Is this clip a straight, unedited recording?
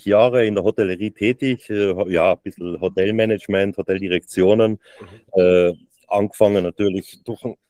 yes; 0 cuts

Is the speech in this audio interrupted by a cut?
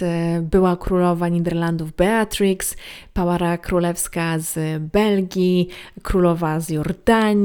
no; 0 cuts

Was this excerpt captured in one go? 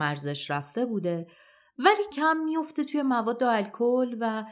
no; 1 cut; at 2.1 s

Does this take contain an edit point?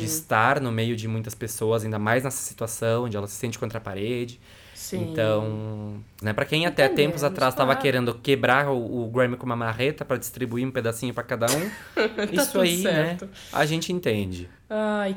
yes; 1 cut; at 6.2 s

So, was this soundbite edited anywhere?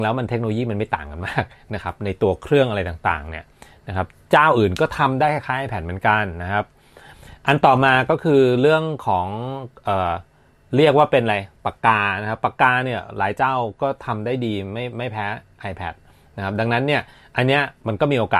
no; 0 cuts

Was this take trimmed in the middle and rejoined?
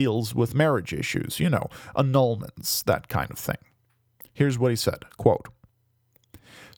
no; 0 cuts

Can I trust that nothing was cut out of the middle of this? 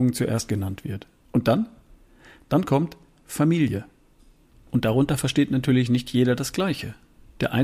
yes; 0 cuts

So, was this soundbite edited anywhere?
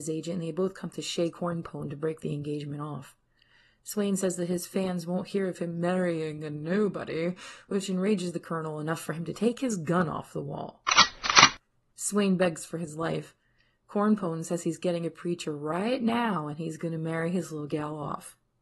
no; 0 cuts

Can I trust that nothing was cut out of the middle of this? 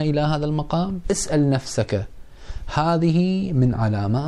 no; 1 cut; at 1.0 s

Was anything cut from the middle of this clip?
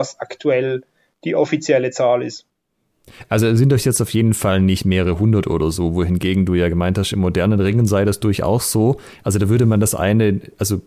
no; 0 cuts

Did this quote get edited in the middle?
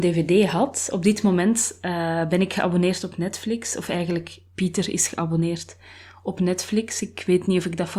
no; 0 cuts

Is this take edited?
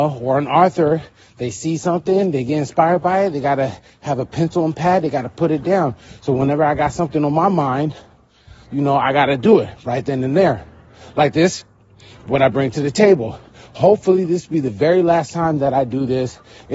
no; 0 cuts

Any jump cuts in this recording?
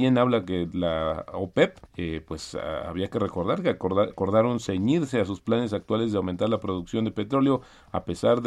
yes; 2 cuts; at 1.9 s, 4.1 s

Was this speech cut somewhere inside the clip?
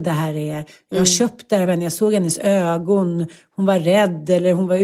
no; 0 cuts

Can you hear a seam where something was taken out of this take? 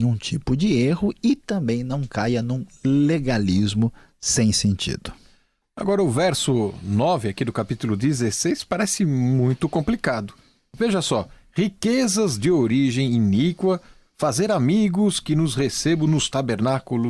no; 0 cuts

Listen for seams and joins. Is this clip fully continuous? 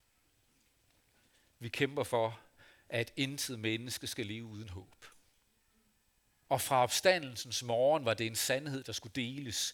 no; 1 cut; at 6.4 s

